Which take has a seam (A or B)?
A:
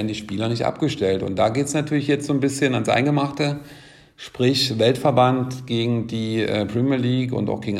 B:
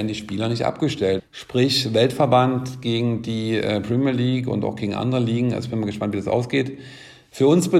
B